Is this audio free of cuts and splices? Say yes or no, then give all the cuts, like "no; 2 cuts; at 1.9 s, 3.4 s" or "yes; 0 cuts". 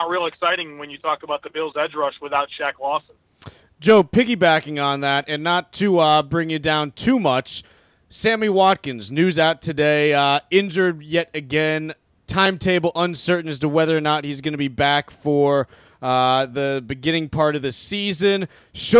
yes; 0 cuts